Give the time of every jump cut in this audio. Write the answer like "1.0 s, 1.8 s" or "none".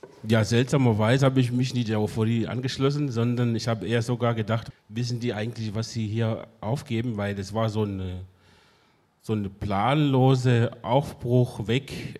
4.7 s